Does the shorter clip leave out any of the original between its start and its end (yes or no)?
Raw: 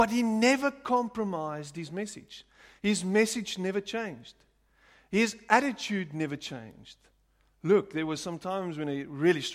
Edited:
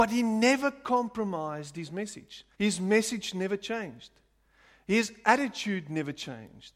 yes